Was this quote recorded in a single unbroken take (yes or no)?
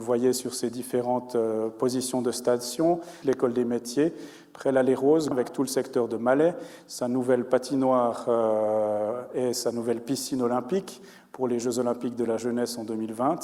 no